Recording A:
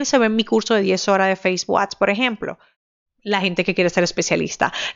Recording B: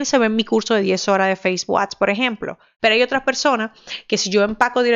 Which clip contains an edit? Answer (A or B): B